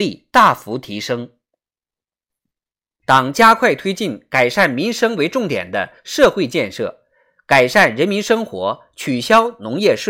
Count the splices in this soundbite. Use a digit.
1